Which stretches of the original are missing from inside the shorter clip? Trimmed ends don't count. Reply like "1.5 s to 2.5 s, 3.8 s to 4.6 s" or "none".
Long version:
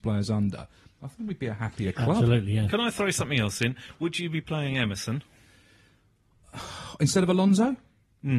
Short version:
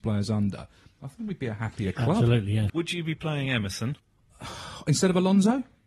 2.7 s to 4.0 s, 5.3 s to 6.1 s